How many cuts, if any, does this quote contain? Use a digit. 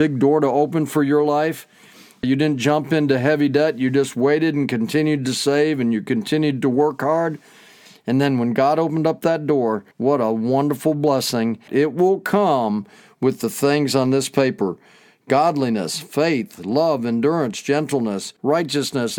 2